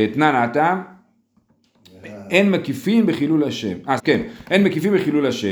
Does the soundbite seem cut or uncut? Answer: cut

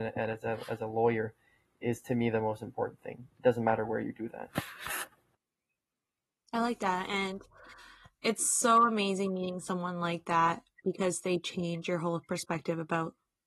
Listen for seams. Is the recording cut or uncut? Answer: uncut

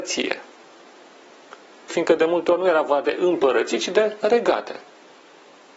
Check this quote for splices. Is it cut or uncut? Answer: cut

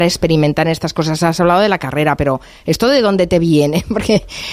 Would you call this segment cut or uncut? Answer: uncut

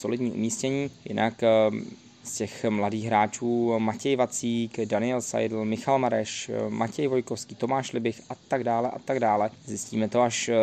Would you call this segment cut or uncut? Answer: uncut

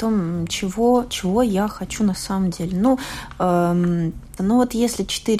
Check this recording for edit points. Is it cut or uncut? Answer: cut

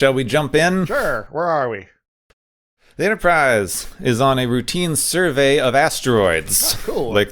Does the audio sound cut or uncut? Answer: uncut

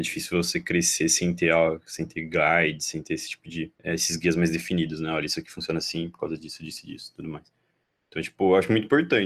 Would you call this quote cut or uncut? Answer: cut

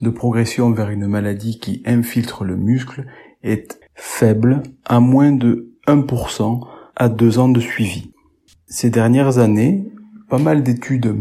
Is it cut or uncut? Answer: cut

